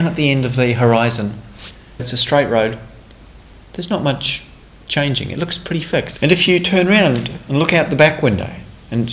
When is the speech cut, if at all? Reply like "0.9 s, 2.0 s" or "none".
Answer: 2.0 s, 6.2 s